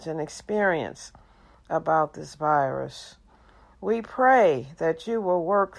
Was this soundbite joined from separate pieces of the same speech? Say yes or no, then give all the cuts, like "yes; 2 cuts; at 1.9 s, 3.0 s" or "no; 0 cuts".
no; 0 cuts